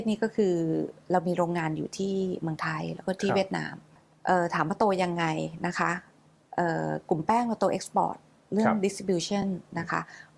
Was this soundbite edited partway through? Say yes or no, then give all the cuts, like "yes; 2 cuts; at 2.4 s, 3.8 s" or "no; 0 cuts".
no; 0 cuts